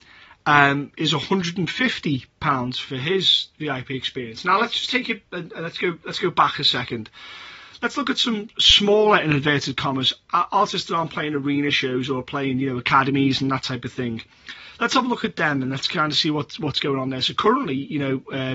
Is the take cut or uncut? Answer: uncut